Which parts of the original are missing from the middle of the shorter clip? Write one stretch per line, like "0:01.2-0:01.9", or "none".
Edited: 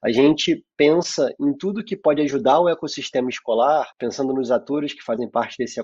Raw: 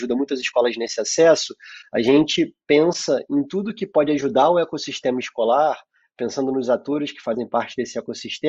0:05.8-0:06.1